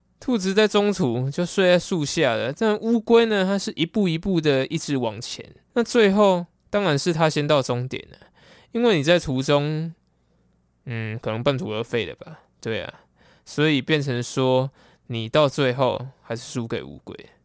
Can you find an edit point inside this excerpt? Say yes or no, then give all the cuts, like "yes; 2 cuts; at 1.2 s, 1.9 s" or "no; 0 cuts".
yes; 1 cut; at 5.6 s